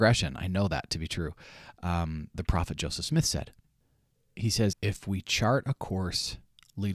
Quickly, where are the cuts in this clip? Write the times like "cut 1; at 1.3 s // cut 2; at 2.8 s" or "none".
cut 1; at 2.3 s // cut 2; at 4.7 s